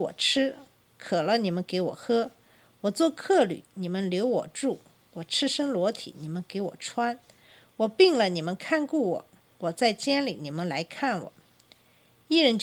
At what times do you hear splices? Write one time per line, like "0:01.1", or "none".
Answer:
none